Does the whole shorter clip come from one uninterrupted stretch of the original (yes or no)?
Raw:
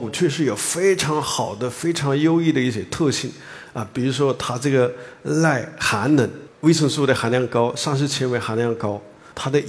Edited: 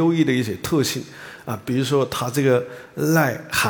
yes